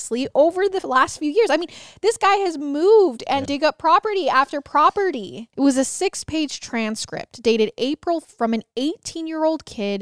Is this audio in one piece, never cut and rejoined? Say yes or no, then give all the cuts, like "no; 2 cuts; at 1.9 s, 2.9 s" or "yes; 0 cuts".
no; 3 cuts; at 3.5 s, 5.5 s, 8.2 s